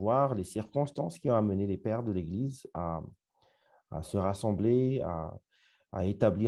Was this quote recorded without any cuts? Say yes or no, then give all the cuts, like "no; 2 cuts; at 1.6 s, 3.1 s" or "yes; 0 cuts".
yes; 0 cuts